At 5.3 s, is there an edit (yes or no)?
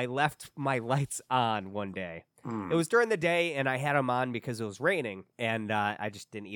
yes